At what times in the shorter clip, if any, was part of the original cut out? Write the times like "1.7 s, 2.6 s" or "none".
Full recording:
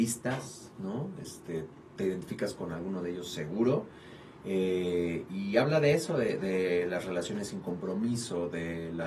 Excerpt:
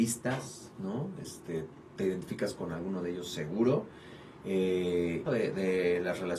5.3 s